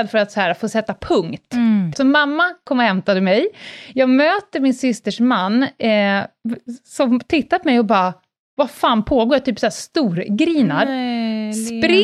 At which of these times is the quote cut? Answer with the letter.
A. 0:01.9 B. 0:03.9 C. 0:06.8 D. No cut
A